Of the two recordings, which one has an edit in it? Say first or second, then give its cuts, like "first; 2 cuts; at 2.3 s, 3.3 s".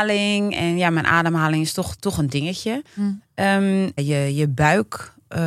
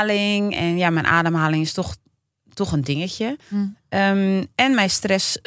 first; 2 cuts; at 2.0 s, 4.0 s